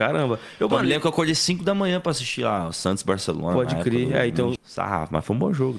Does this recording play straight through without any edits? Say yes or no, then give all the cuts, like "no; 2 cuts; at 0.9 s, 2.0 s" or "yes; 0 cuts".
no; 1 cut; at 4.6 s